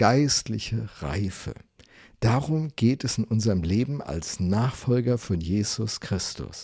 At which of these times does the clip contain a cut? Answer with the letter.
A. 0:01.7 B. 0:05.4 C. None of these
C